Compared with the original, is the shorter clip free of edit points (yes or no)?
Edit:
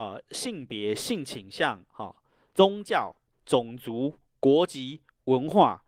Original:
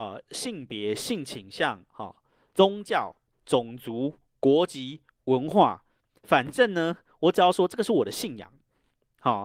yes